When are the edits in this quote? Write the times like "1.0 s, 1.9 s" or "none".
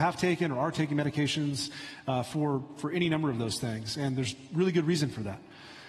none

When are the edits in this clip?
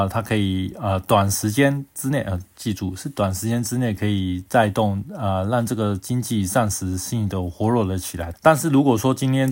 8.3 s

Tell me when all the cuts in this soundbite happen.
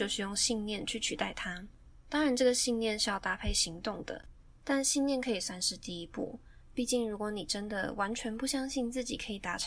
none

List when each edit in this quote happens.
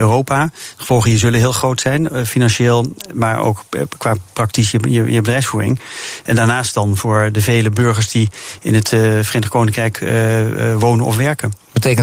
none

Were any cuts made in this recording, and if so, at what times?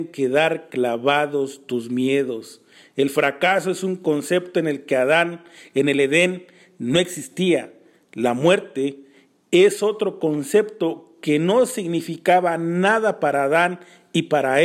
none

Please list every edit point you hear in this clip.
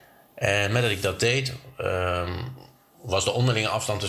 none

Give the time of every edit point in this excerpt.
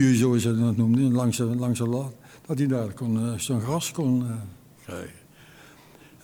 none

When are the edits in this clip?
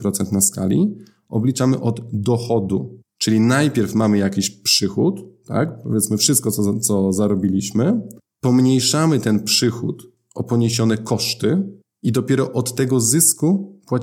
none

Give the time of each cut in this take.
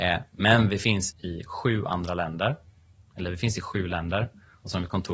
1.1 s

